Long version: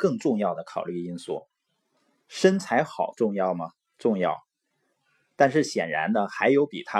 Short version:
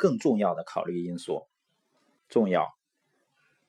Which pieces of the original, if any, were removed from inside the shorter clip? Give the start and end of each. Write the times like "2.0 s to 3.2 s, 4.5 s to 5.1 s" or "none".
2.2 s to 3.9 s